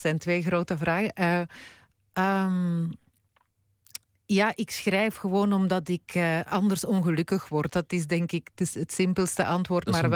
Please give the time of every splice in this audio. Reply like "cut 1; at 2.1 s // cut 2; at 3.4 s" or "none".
none

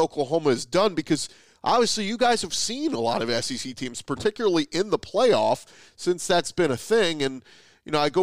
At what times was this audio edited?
none

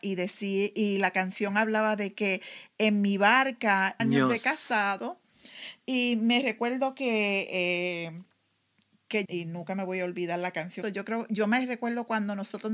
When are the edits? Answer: cut 1; at 4.0 s // cut 2; at 9.2 s // cut 3; at 10.8 s

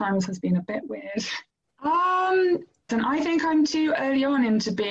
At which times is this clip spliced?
cut 1; at 1.6 s // cut 2; at 2.9 s

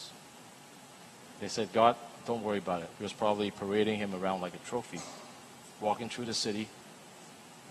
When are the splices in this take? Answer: cut 1; at 2.9 s // cut 2; at 5.6 s

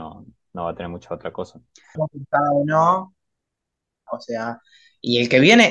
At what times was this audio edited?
cut 1; at 1.9 s // cut 2; at 4.1 s

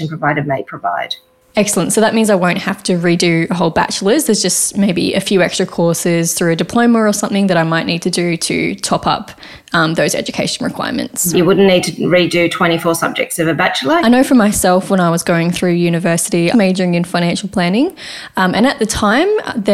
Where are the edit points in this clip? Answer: cut 1; at 11.3 s // cut 2; at 14.0 s // cut 3; at 16.5 s

